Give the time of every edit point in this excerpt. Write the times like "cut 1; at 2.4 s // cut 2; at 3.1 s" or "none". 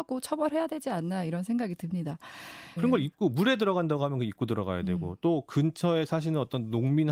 cut 1; at 2.8 s